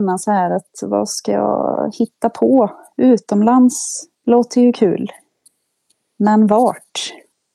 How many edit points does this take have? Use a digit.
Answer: 1